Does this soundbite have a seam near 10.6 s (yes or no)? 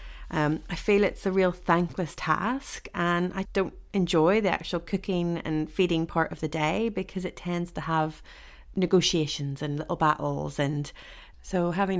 no